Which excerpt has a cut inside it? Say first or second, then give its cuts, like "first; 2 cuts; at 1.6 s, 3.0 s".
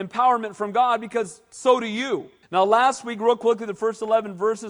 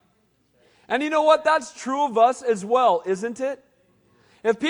first; 1 cut; at 2.4 s